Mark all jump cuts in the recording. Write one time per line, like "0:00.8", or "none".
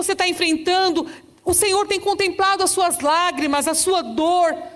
none

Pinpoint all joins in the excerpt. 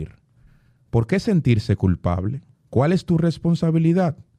0:02.5

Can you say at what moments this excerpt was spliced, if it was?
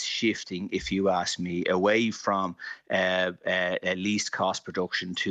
none

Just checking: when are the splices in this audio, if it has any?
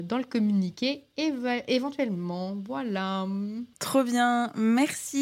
0:03.7

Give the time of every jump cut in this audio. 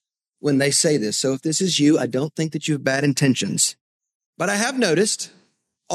none

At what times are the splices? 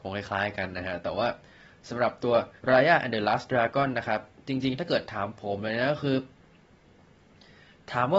0:02.6

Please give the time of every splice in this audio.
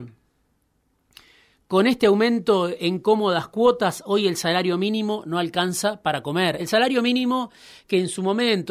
none

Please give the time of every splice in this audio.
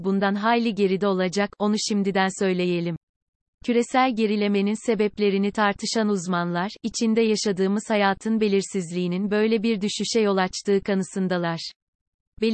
none

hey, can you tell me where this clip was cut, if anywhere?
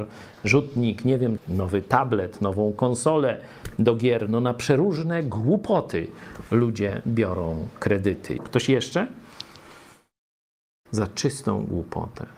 0:01.4
0:08.4
0:10.9

